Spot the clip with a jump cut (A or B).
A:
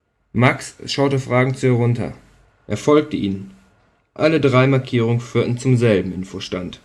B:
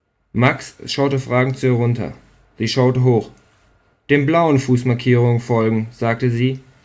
A